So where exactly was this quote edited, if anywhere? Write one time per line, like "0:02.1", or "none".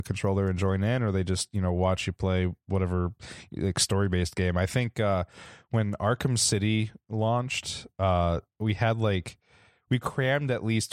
none